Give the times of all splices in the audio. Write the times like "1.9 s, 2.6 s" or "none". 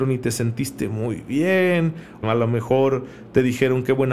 2.2 s